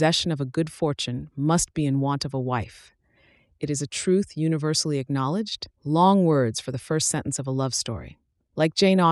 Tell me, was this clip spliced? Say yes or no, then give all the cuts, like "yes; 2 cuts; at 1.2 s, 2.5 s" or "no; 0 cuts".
yes; 1 cut; at 5.7 s